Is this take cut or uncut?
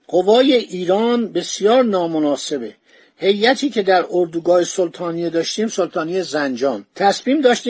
uncut